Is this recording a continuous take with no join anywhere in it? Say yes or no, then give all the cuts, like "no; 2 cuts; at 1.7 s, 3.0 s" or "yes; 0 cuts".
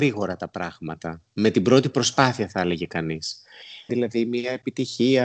no; 1 cut; at 3.9 s